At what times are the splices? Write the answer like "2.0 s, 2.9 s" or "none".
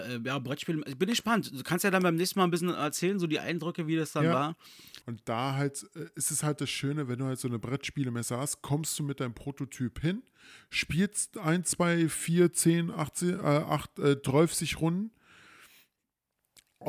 5.0 s